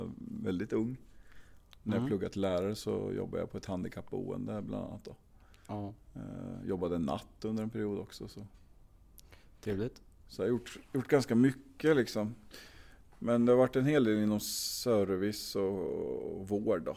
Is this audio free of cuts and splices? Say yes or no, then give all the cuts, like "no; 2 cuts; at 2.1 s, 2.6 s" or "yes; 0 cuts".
no; 1 cut; at 1.8 s